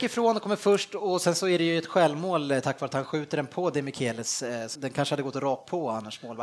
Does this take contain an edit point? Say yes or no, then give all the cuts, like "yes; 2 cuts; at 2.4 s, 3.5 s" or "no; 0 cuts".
yes; 1 cut; at 4.8 s